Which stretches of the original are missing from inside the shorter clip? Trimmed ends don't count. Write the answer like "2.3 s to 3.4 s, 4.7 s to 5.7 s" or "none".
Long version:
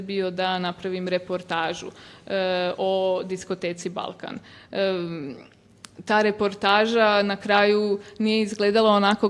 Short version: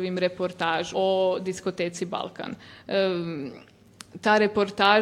1.8 s to 2.8 s